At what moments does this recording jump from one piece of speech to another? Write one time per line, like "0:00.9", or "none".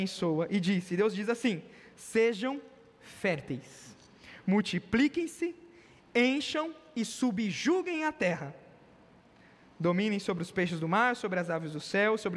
none